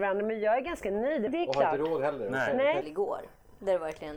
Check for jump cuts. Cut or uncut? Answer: cut